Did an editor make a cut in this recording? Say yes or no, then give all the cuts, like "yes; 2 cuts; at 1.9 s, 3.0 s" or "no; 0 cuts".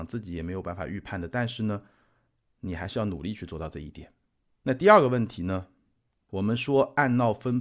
no; 0 cuts